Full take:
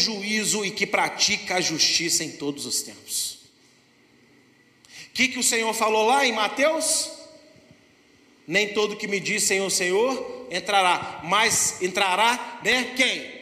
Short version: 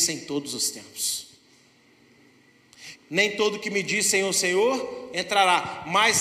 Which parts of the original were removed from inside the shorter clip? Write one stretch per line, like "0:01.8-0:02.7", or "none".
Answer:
0:05.1-0:08.3